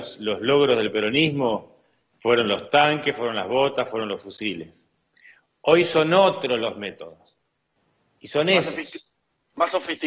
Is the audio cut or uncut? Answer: uncut